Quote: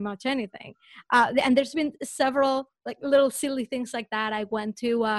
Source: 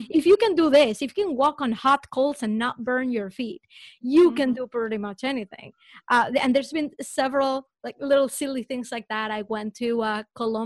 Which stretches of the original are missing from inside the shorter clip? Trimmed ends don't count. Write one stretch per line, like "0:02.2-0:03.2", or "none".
none